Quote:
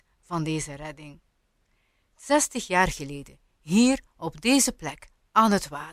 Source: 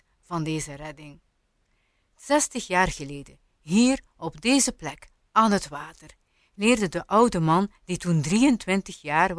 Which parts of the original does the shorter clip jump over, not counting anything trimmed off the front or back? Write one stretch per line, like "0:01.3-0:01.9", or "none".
none